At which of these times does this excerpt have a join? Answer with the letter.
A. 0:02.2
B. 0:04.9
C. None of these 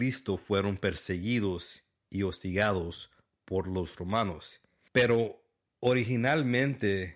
B